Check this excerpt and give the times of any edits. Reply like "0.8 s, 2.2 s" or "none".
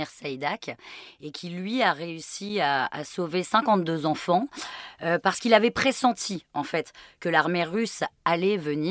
none